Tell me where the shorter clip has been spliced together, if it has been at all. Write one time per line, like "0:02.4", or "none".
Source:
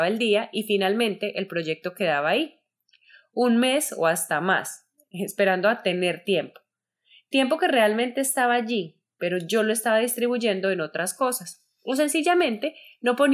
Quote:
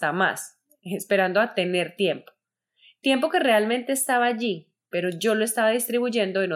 none